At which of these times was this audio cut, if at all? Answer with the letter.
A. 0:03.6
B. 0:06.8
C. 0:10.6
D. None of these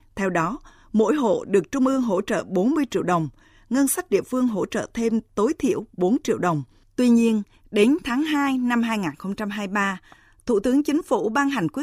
B